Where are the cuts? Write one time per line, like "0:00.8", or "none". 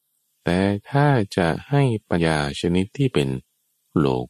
0:02.2